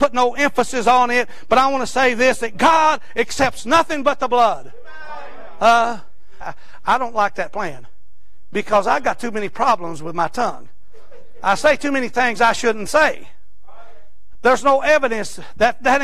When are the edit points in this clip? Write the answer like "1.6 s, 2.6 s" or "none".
6.4 s, 14.3 s